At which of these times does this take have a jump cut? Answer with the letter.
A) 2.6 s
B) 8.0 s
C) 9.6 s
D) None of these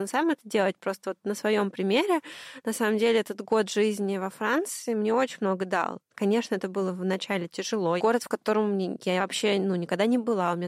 B